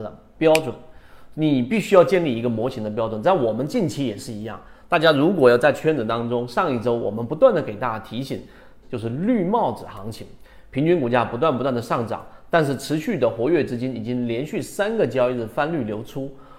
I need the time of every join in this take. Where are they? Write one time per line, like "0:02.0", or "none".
0:08.8

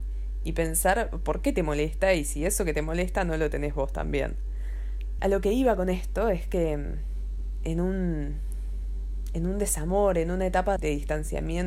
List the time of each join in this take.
0:05.2
0:10.8

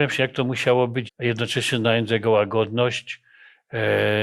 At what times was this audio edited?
0:01.1

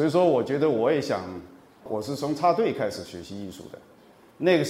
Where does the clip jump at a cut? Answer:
0:01.8

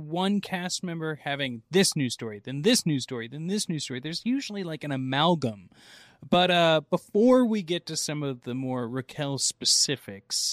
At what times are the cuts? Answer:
none

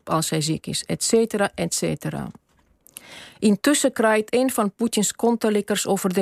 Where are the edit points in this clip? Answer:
none

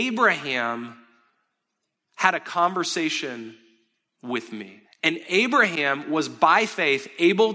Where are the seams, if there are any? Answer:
0:04.8

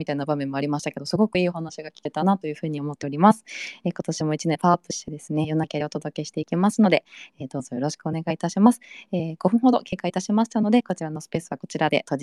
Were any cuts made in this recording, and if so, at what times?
none

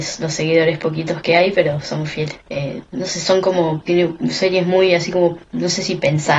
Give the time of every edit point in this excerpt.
0:02.4

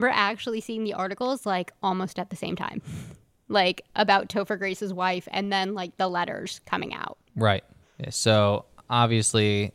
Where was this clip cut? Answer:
0:07.8

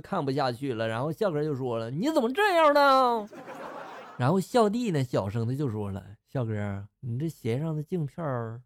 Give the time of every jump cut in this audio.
none

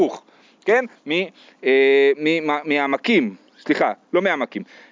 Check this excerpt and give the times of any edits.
0:01.0

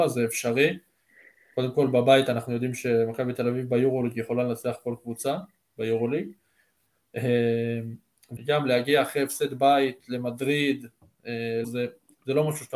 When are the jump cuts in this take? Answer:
0:08.4
0:11.6

